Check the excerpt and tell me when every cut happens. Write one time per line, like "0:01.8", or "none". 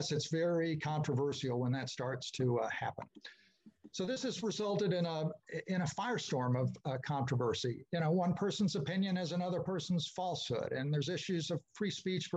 none

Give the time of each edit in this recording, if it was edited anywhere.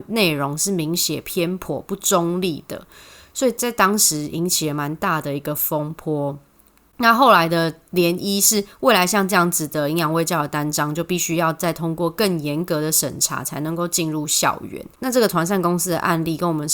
none

